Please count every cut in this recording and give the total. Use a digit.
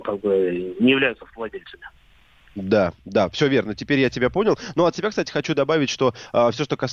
0